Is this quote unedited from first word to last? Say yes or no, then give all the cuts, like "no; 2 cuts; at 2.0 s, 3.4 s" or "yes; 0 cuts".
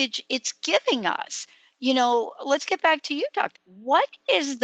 no; 1 cut; at 3.5 s